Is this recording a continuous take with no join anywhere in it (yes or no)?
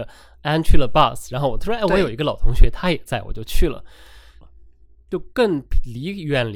no